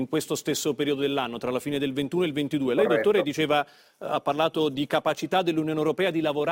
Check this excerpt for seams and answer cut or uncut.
uncut